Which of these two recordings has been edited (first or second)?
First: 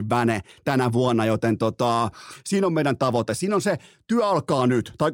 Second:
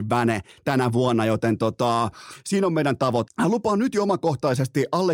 second